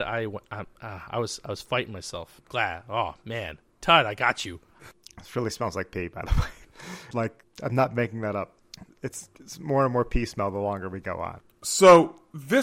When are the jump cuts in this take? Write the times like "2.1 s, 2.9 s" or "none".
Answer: 4.8 s, 7.1 s